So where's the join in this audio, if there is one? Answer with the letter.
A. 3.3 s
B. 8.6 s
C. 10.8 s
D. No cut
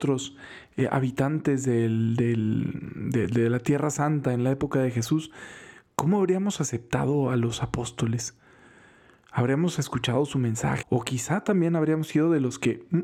C